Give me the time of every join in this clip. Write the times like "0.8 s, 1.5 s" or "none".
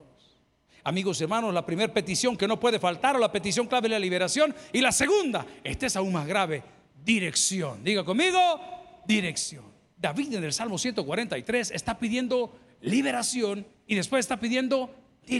none